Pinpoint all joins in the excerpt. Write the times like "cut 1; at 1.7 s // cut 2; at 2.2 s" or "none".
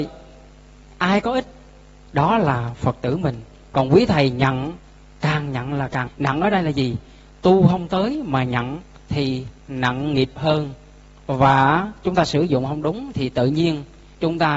cut 1; at 6.1 s // cut 2; at 9.6 s

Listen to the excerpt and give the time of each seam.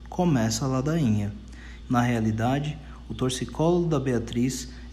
cut 1; at 1.8 s

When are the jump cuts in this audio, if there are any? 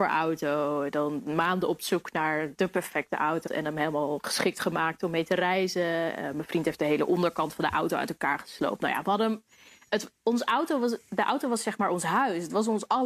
cut 1; at 3.5 s

